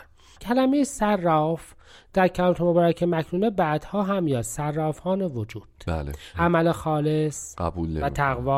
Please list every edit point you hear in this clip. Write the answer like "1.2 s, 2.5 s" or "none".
6.3 s